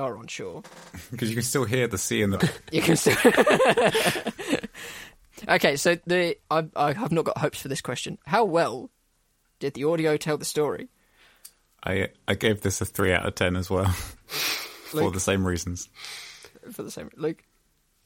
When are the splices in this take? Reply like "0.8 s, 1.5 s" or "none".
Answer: 2.4 s

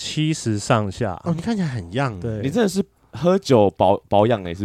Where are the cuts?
1.2 s

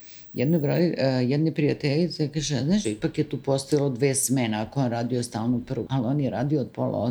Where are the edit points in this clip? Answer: 2.8 s, 5.9 s

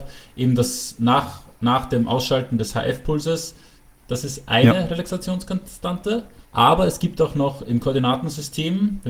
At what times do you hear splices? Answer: 4.0 s, 6.4 s

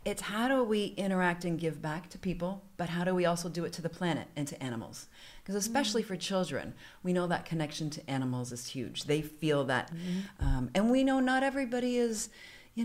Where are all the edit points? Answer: 9.9 s

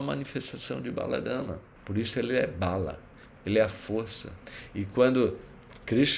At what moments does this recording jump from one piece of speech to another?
1.8 s

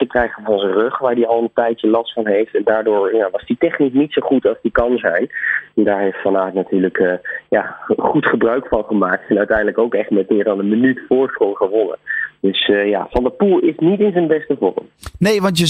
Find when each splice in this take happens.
none

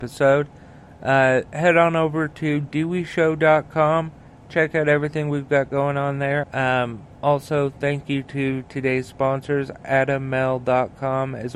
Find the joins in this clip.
6.4 s

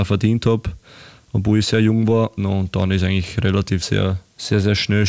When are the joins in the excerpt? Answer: 2.4 s, 3.8 s

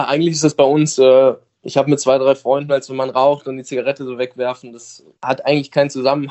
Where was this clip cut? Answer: 2.7 s

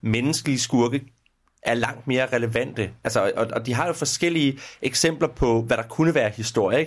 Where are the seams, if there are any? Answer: none

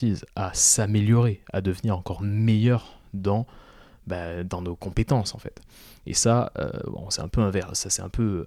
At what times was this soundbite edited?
none

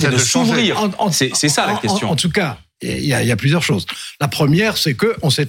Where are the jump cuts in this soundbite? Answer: none

